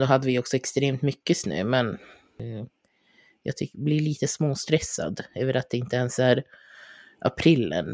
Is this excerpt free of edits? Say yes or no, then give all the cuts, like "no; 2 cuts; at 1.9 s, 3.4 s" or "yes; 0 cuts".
yes; 0 cuts